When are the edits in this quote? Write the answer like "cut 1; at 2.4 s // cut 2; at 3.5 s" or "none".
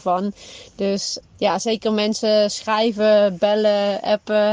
cut 1; at 1.2 s

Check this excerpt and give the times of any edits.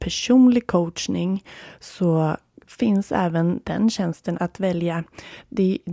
cut 1; at 4.3 s

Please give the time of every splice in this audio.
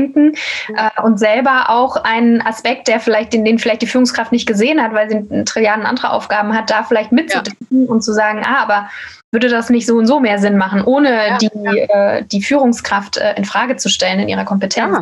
none

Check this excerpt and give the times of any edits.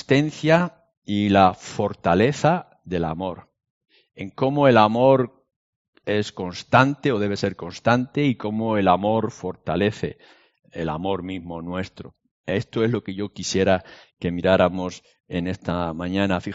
none

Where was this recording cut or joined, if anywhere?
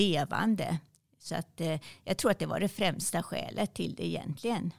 none

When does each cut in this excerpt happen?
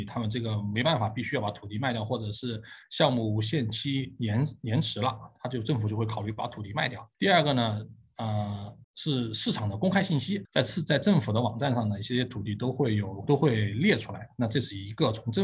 cut 1; at 7.1 s // cut 2; at 8.8 s // cut 3; at 10.5 s

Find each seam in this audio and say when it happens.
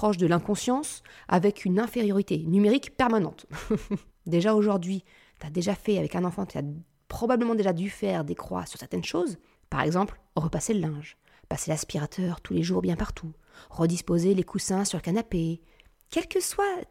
cut 1; at 4.1 s // cut 2; at 9.6 s

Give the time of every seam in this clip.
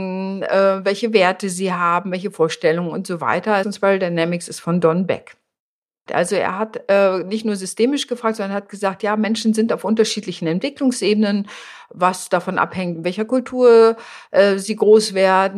cut 1; at 3.6 s // cut 2; at 6.1 s

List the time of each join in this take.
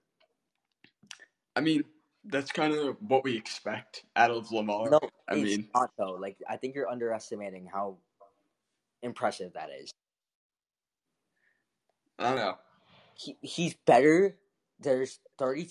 none

